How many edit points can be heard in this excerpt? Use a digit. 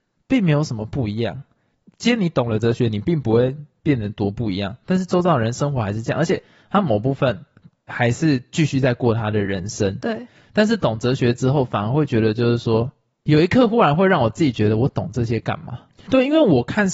1